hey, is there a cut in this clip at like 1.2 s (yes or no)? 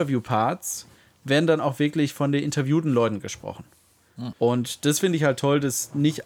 no